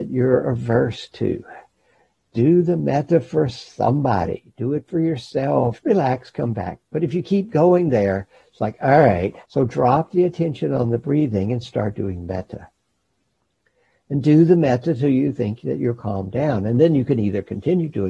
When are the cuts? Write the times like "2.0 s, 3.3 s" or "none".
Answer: 5.8 s, 9.4 s